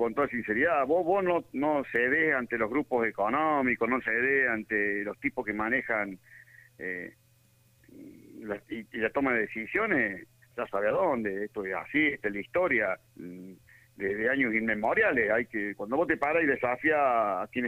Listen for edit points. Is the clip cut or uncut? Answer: cut